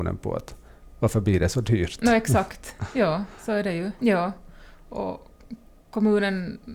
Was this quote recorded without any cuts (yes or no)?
no